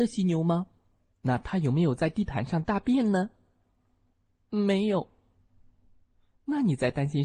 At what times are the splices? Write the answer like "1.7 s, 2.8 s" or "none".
1.1 s